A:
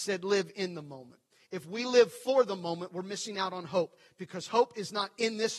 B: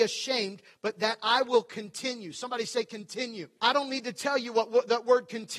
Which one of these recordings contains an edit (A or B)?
B